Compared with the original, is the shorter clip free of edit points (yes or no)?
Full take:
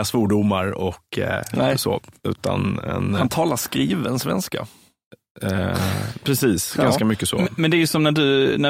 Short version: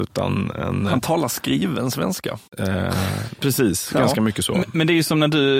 no